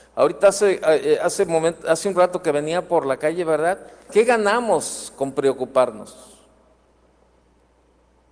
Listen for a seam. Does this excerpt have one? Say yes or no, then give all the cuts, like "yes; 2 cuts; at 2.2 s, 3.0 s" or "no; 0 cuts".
yes; 1 cut; at 4.1 s